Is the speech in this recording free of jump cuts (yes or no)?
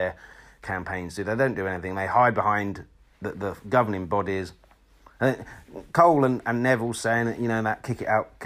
yes